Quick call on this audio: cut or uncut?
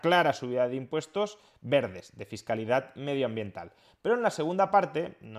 uncut